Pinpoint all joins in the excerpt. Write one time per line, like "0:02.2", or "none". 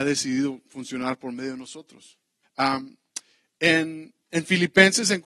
0:02.4

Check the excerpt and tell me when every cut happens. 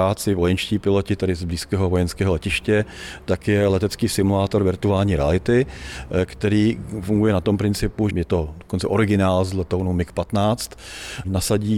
0:08.1

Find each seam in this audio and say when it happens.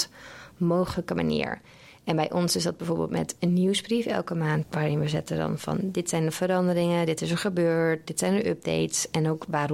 none

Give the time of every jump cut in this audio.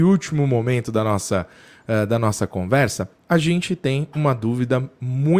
0:03.2

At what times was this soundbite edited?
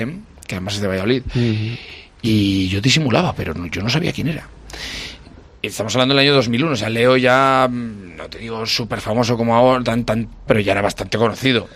0:10.5

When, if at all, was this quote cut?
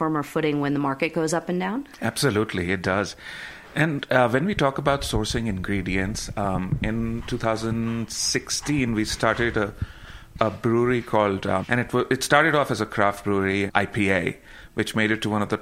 0:11.6
0:13.7

